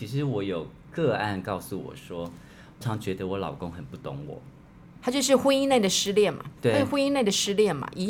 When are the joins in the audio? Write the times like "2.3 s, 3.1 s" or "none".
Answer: 2.8 s, 5.0 s, 6.6 s